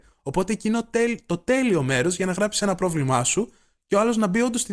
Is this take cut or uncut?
uncut